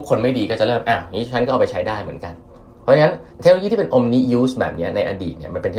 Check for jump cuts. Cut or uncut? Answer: cut